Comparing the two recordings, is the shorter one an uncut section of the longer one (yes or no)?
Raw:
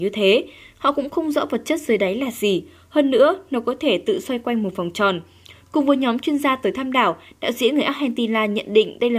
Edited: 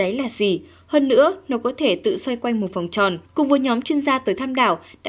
no